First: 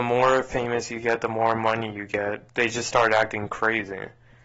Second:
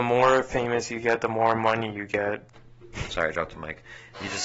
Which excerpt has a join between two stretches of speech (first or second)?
second